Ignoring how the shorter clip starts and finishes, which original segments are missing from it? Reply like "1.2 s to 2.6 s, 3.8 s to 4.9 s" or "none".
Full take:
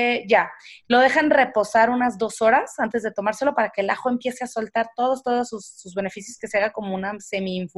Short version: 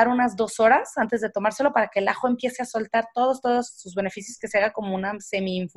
5.5 s to 5.7 s